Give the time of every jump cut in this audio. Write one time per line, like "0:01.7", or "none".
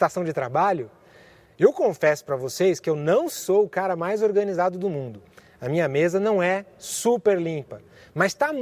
none

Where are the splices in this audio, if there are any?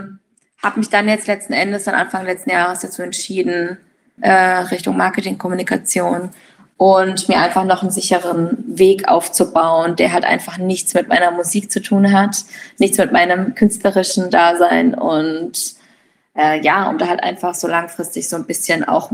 0:04.2

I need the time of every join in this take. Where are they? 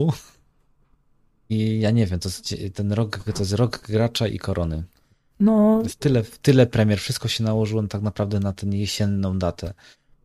0:05.3

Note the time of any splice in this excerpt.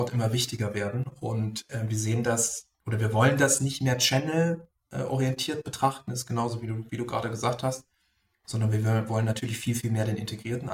none

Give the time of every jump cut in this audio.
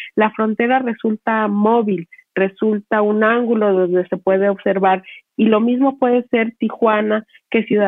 none

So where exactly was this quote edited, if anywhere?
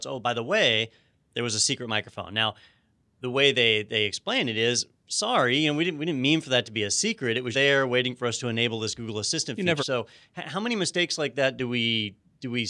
0:07.5
0:09.8

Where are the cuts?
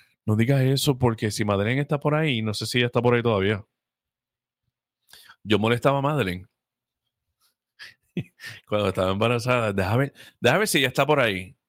none

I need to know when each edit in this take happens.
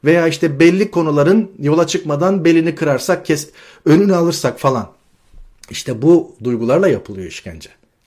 none

